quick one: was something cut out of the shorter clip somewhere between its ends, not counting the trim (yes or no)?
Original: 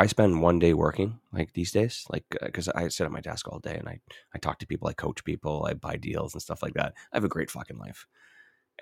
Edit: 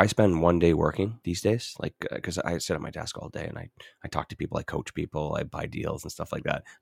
yes